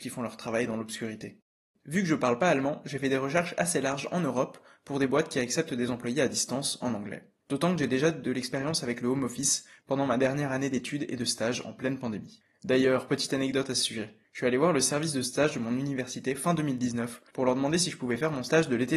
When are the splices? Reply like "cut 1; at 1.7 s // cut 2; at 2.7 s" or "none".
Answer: none